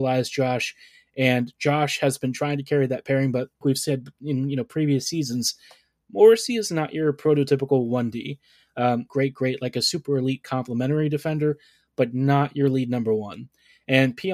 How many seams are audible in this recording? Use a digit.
2